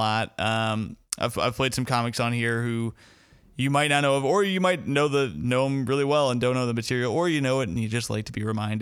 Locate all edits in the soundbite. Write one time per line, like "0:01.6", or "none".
none